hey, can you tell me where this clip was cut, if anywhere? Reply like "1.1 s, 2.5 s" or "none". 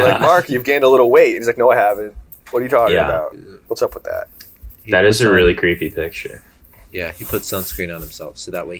2.4 s, 3.7 s

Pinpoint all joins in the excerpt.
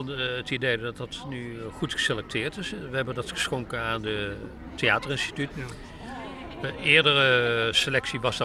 5.5 s

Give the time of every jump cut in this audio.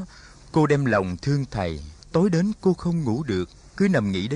2.0 s

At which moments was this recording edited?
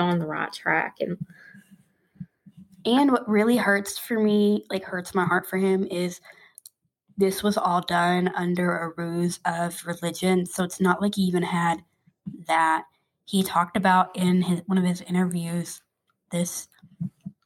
none

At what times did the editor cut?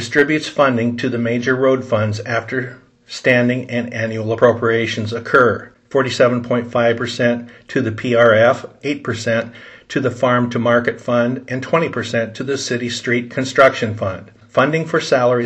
8.8 s

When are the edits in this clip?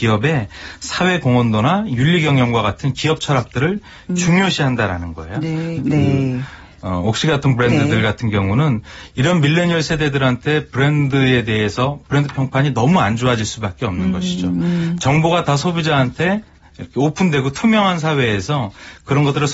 5.8 s

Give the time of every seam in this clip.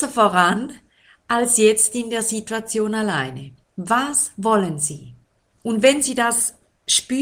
5.5 s

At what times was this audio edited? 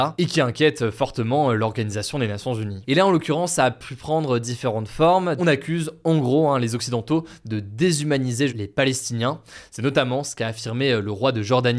5.4 s, 8.5 s

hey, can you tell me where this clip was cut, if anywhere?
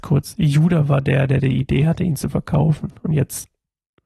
none

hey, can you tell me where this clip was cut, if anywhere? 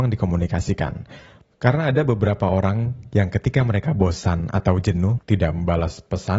1.5 s, 5.2 s

